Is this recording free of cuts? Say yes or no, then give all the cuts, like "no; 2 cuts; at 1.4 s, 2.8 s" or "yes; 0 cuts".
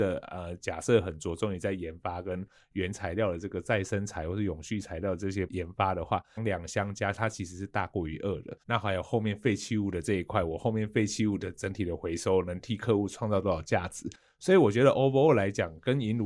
no; 2 cuts; at 6.4 s, 8.6 s